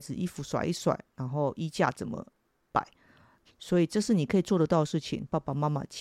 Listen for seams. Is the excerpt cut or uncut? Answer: cut